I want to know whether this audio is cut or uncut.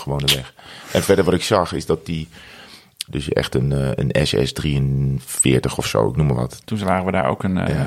cut